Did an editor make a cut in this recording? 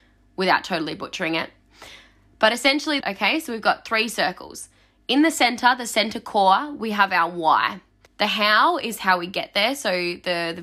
yes; 2 cuts; at 3.0 s, 8.1 s

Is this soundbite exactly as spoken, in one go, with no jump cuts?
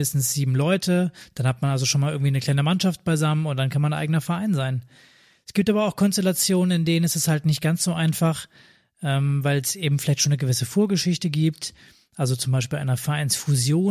yes; 0 cuts

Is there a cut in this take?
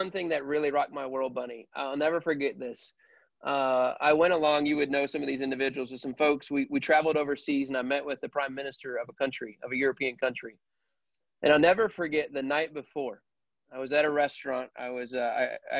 no; 0 cuts

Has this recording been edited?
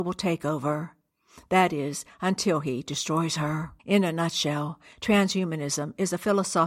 yes; 1 cut; at 3.8 s

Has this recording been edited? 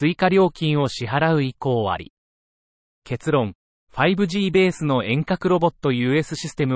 no; 0 cuts

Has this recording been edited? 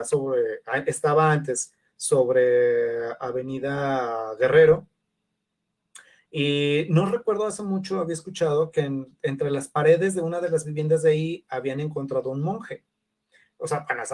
no; 0 cuts

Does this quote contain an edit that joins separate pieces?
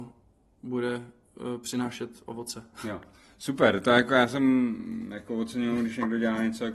no; 0 cuts

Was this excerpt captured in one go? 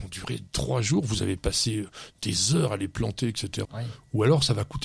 no; 1 cut; at 3.6 s

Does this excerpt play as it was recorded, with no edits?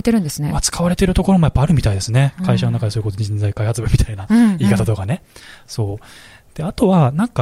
yes; 0 cuts

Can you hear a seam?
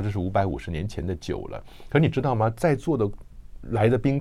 no; 0 cuts

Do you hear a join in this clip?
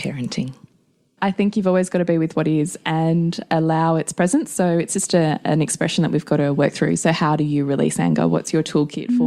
yes; 1 cut; at 1.2 s

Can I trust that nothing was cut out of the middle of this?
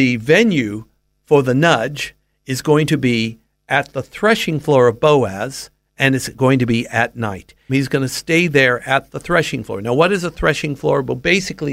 no; 1 cut; at 7.7 s

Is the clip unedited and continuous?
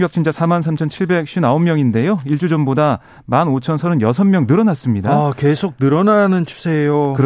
yes; 0 cuts

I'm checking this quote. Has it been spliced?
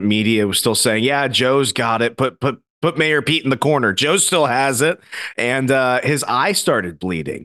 no; 0 cuts

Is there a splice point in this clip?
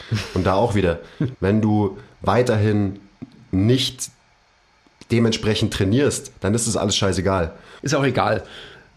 yes; 2 cuts; at 1.3 s, 7.8 s

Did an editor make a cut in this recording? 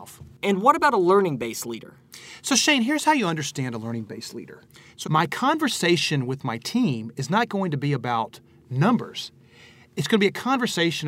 yes; 1 cut; at 5.0 s

